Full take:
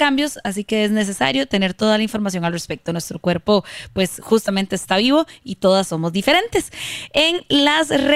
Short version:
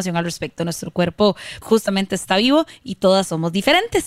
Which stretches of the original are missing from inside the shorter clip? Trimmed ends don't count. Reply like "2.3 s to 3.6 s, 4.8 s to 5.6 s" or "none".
3.9 s to 4.2 s